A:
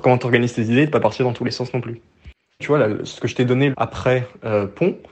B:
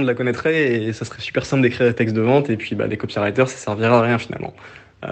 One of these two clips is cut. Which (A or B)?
A